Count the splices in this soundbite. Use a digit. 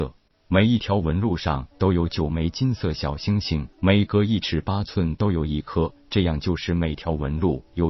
1